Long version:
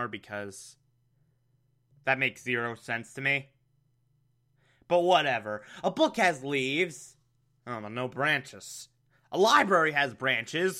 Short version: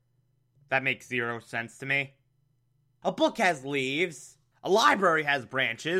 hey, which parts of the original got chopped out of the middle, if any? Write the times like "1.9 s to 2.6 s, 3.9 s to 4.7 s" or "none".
4.4 s to 5.8 s, 7.3 s to 9.2 s